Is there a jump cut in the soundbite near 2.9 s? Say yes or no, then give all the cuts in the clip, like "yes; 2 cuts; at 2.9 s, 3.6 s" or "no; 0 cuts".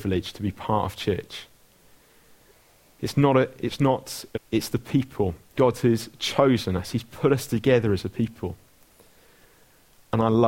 no; 2 cuts; at 4.3 s, 5.6 s